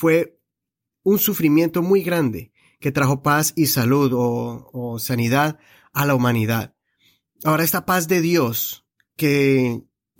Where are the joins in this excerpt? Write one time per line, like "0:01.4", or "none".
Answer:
none